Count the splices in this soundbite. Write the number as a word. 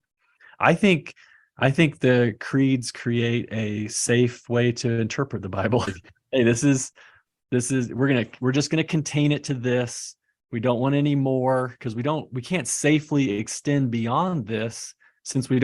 one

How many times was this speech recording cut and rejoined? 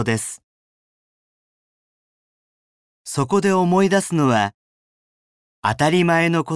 zero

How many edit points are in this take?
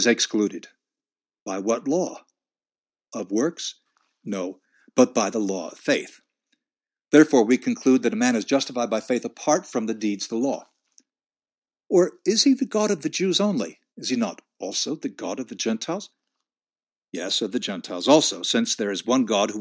one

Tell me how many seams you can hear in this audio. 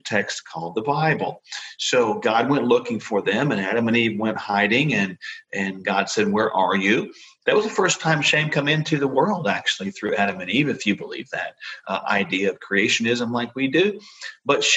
one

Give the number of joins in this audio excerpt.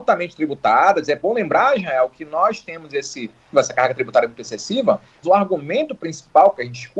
two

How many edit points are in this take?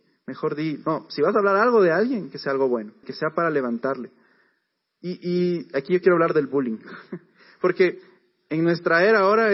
one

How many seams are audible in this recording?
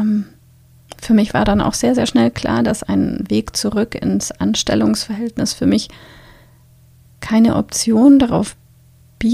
one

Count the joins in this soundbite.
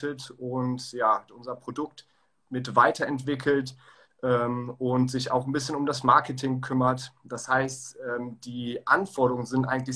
one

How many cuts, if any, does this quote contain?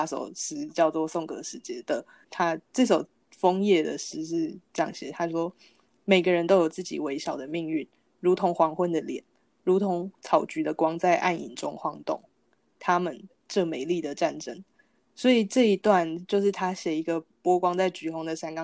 one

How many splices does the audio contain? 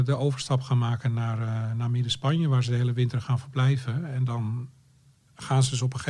zero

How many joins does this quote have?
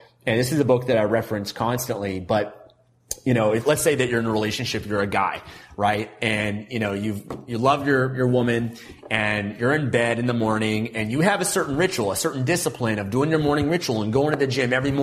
zero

